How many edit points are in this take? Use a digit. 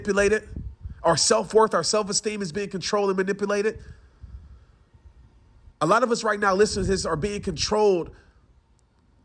1